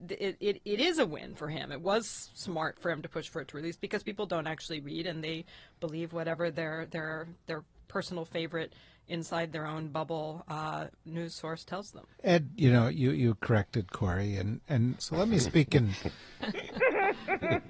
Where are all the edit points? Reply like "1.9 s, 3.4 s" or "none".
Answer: 12.1 s, 15.0 s